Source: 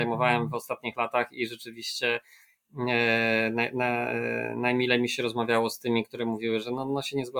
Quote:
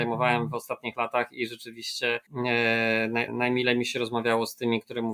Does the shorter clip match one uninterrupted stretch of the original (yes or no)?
no